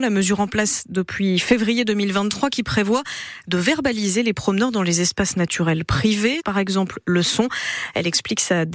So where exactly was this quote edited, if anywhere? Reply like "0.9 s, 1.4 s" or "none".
6.4 s